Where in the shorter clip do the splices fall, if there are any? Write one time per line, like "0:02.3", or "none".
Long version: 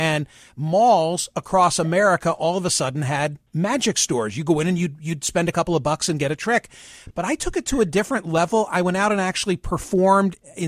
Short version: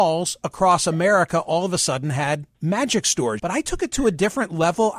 0:03.4